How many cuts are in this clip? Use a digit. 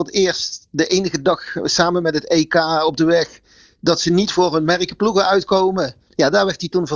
1